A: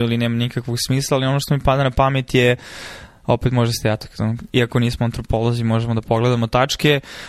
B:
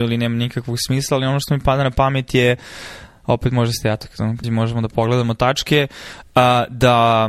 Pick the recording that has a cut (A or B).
B